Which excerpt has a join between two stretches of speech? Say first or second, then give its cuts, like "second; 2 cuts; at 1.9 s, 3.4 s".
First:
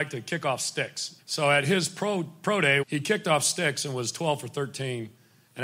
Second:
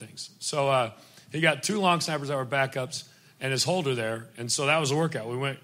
first; 2 cuts; at 1.2 s, 2.8 s